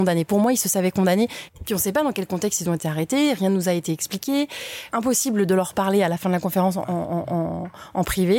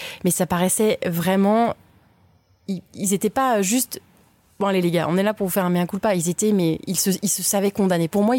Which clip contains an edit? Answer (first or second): first